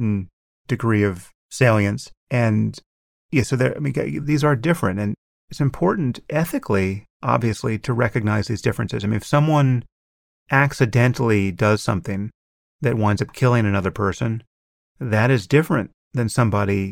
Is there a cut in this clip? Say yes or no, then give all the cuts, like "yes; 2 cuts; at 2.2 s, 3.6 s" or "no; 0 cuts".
yes; 1 cut; at 2.2 s